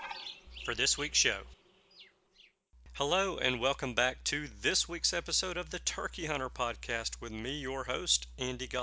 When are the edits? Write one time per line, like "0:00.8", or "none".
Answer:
none